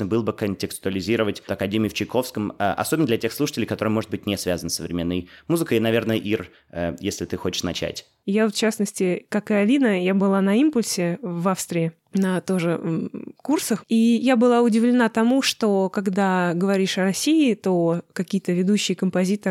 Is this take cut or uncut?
cut